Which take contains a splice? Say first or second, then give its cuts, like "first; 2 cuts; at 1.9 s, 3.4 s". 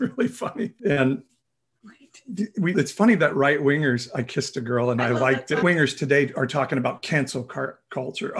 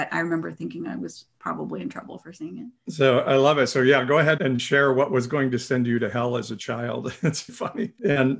second; 2 cuts; at 4.4 s, 7.5 s